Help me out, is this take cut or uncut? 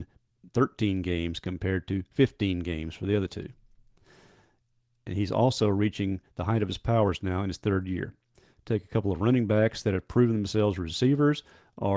uncut